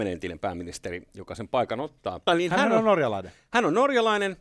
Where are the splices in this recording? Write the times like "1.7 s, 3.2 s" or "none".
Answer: 2.3 s